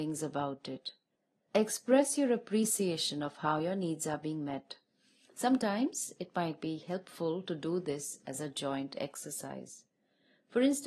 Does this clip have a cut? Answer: no; 0 cuts

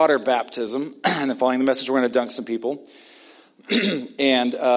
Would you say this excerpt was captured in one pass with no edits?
yes; 0 cuts

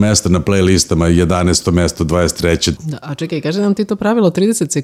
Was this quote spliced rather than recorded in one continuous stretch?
yes; 1 cut; at 2.8 s

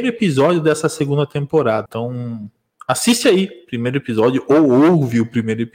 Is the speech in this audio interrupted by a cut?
yes; 1 cut; at 1.9 s

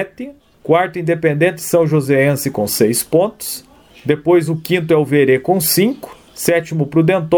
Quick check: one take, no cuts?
no; 1 cut; at 6.3 s

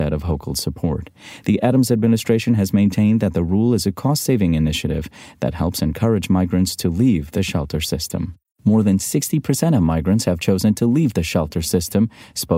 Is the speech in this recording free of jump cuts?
yes; 0 cuts

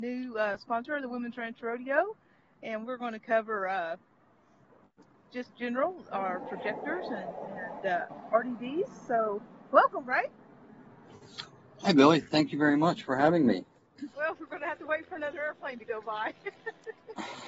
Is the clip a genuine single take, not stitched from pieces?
no; 1 cut; at 14.1 s

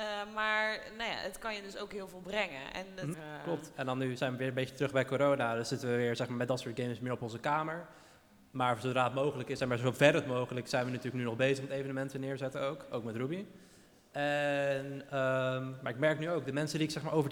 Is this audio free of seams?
no; 1 cut; at 3.1 s

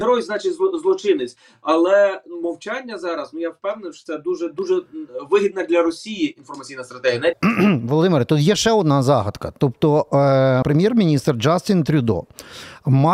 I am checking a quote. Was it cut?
yes; 2 cuts; at 7.3 s, 10.6 s

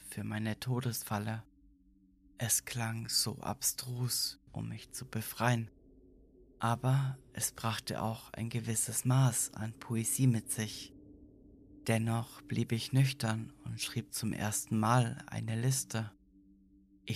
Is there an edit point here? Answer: yes; 1 cut; at 4.5 s

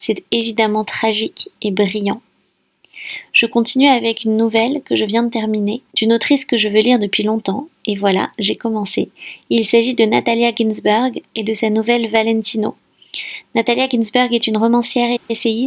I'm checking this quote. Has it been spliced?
no; 0 cuts

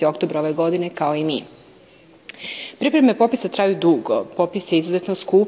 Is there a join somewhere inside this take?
no; 0 cuts

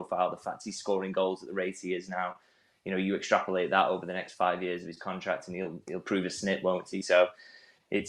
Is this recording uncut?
yes; 0 cuts

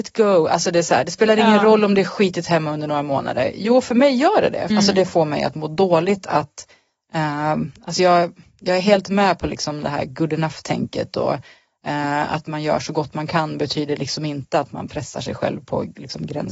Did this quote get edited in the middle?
yes; 1 cut; at 4.7 s

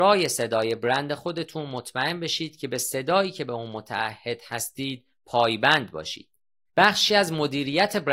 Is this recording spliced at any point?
yes; 1 cut; at 6.7 s

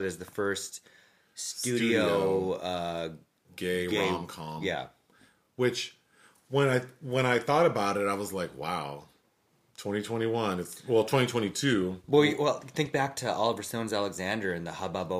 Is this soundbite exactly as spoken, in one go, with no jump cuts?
yes; 0 cuts

